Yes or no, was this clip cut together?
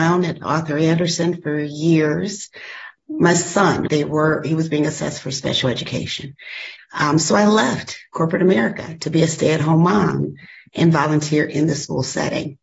yes